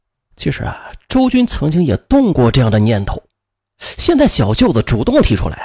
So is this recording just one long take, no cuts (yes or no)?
yes